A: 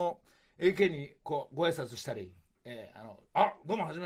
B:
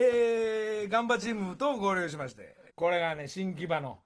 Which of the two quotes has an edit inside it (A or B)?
B